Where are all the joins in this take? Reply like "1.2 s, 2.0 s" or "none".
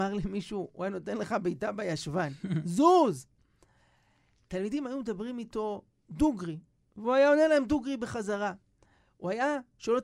none